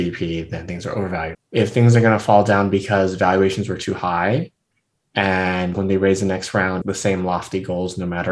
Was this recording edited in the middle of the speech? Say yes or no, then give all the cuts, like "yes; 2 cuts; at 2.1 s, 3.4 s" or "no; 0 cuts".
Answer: yes; 3 cuts; at 1.3 s, 5.7 s, 6.8 s